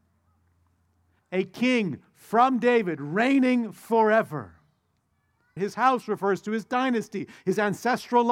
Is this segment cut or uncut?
cut